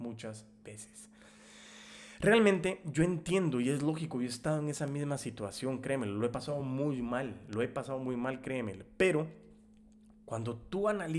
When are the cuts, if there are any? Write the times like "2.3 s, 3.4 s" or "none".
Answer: none